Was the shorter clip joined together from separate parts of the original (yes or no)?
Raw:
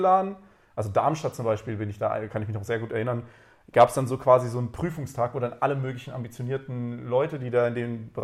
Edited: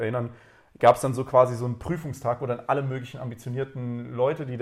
no